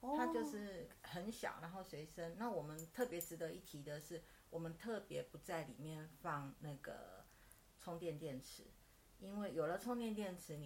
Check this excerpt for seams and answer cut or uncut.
uncut